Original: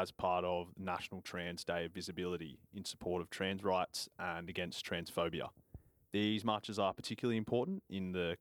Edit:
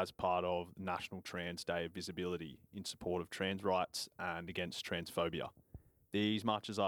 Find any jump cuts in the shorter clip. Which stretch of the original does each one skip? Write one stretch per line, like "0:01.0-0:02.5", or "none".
none

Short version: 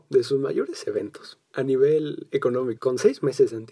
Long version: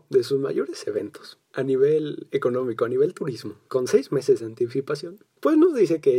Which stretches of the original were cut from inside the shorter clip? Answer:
0:02.8-0:03.7

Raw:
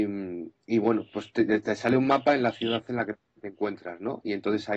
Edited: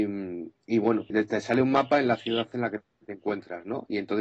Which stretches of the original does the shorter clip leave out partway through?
0:01.1-0:01.5

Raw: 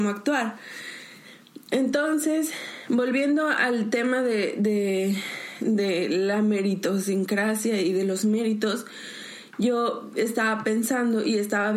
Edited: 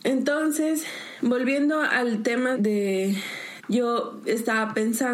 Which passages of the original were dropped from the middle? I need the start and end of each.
0:04.2-0:04.6
0:05.6-0:09.5

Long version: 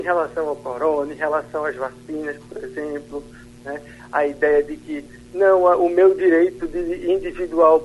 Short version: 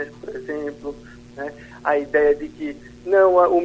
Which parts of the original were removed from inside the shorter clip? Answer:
none

